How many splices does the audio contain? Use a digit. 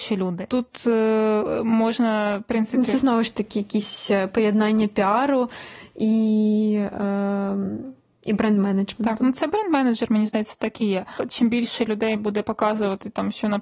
0